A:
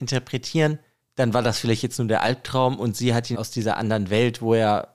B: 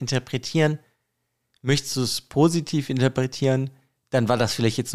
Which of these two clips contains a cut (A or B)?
A